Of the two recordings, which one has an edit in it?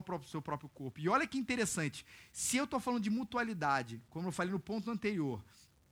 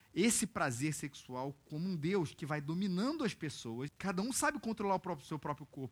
second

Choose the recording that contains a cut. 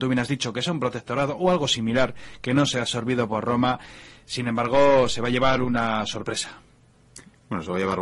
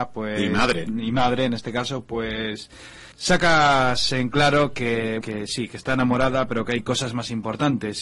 second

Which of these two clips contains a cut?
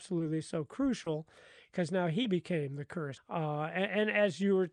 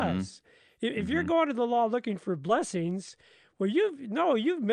first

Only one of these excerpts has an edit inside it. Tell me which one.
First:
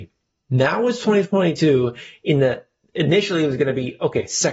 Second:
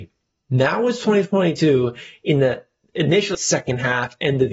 second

